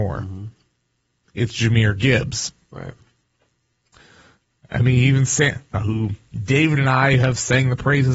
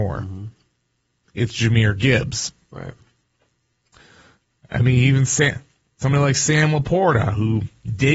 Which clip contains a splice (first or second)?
first